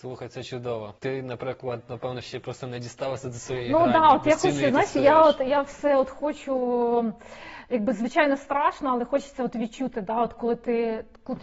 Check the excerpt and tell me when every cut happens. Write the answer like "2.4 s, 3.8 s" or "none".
1.0 s

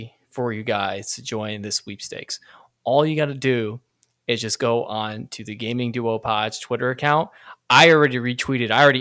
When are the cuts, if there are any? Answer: none

